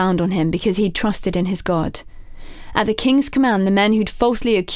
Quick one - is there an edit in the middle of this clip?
no; 0 cuts

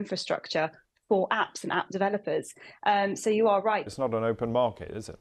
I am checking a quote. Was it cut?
yes; 1 cut; at 3.9 s

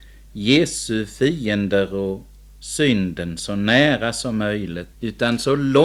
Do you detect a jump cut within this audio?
yes; 1 cut; at 4.9 s

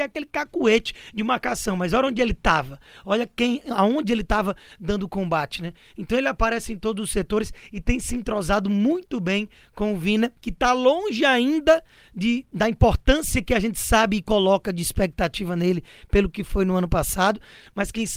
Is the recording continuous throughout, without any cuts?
no; 1 cut; at 10.4 s

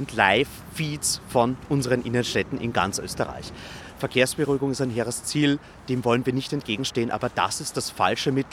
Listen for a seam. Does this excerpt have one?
yes; 1 cut; at 3.8 s

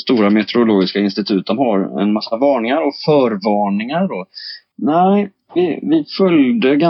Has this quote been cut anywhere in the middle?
yes; 1 cut; at 4.7 s

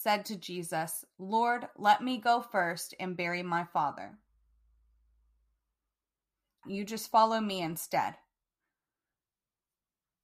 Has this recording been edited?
yes; 1 cut; at 6.6 s

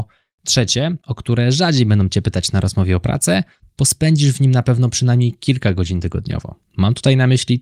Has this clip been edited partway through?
yes; 1 cut; at 3.6 s

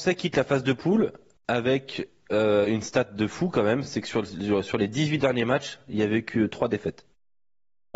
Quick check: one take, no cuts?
yes; 0 cuts

